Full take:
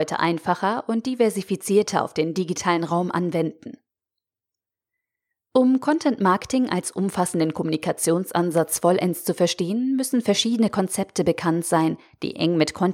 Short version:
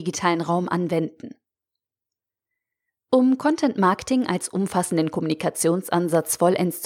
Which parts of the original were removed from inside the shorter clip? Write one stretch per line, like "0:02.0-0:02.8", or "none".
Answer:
none